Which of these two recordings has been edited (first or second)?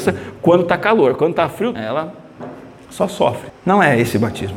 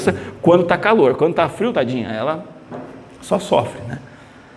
first